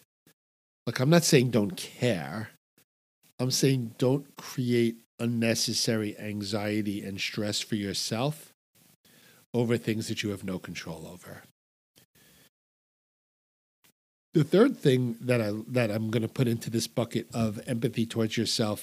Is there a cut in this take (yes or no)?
yes